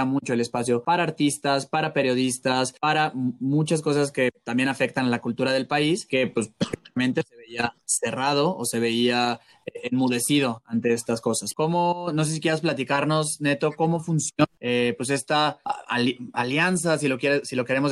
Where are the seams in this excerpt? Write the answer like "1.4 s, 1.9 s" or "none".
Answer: 11.5 s

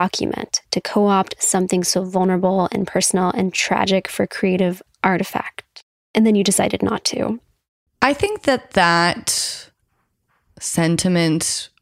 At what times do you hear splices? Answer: 7.9 s

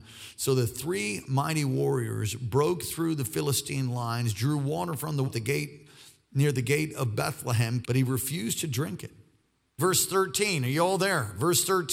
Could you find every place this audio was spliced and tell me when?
5.2 s, 7.8 s, 9.8 s

